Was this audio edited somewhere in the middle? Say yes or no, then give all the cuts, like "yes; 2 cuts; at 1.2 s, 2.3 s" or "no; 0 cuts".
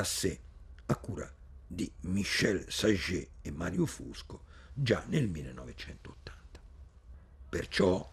no; 0 cuts